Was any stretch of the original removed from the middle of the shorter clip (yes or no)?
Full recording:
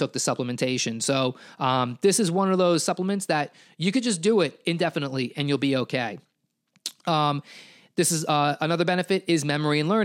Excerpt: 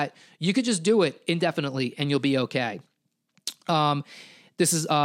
no